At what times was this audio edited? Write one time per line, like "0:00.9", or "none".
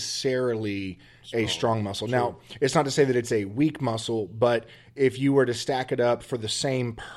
none